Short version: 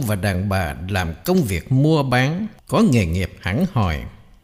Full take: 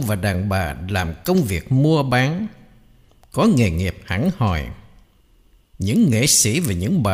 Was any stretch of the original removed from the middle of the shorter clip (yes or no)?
yes